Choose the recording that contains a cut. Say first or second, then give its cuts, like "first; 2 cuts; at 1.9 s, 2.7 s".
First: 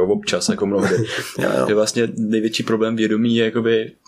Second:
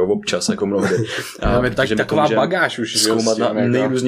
first; 1 cut; at 1.4 s